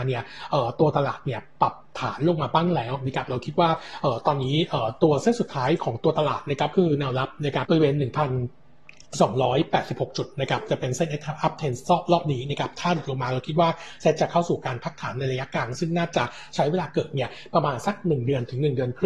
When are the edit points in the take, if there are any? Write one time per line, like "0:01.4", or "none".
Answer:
0:07.7